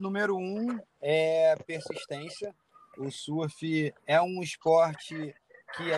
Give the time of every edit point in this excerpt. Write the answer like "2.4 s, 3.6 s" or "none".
4.0 s